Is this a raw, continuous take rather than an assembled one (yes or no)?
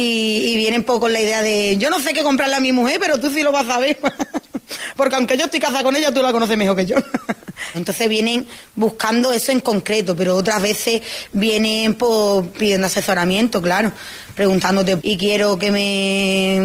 no